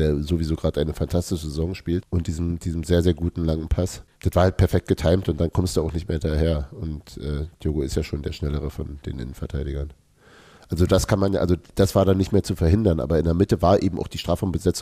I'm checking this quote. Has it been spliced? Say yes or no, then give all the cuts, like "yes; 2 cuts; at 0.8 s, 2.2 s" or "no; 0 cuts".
no; 0 cuts